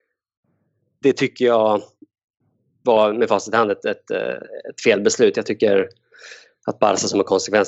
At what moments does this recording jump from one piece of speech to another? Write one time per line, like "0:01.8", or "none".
none